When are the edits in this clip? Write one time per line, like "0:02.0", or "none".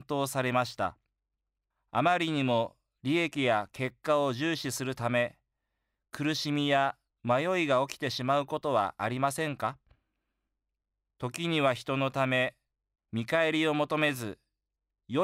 0:01.7
0:13.0